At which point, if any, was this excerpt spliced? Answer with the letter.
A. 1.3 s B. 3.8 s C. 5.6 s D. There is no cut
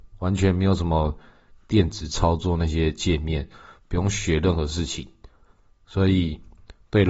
D